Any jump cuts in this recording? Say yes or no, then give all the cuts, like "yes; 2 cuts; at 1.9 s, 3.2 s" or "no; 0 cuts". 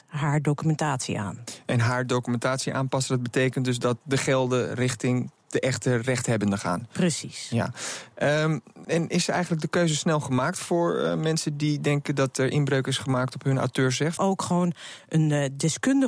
yes; 2 cuts; at 8.8 s, 14.2 s